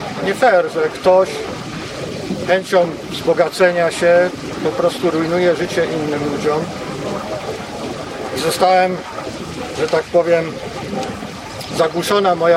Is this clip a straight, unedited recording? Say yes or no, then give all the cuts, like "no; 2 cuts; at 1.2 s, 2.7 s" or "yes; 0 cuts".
yes; 0 cuts